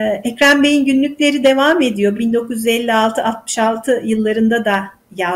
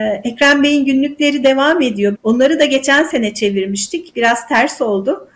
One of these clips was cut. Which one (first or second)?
second